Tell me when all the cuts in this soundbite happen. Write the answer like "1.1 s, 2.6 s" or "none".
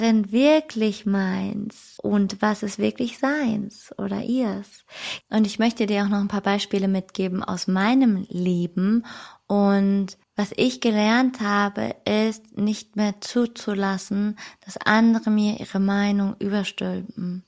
2.0 s, 5.2 s, 10.2 s